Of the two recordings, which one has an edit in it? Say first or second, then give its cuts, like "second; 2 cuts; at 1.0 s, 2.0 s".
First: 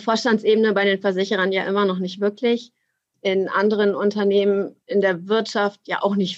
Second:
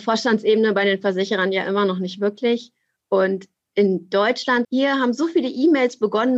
second; 2 cuts; at 3.0 s, 4.6 s